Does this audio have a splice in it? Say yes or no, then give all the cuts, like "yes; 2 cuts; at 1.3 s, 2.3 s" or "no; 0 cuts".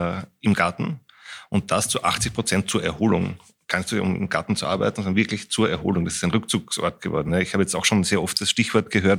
no; 0 cuts